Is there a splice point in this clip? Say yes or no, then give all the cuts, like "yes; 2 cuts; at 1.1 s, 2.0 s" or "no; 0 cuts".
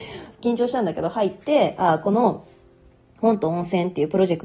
no; 0 cuts